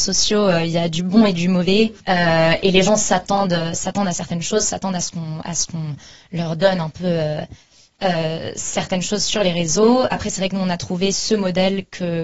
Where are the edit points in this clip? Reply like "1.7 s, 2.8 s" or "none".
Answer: 2.0 s